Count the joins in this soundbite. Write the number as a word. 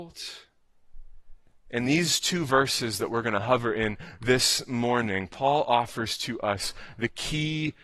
zero